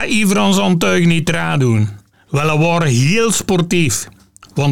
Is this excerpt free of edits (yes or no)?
no